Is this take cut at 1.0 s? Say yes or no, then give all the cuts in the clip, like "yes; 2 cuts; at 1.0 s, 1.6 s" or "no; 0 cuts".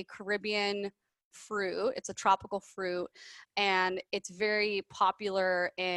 no; 0 cuts